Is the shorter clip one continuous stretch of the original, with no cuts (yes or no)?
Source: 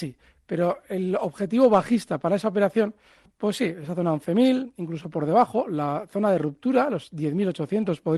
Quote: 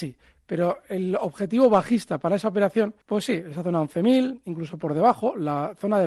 no